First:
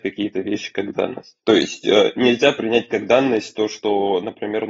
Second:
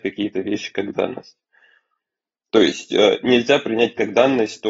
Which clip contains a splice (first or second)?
first